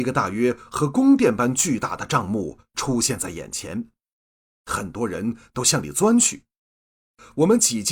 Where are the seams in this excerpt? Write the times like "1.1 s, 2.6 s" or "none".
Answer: none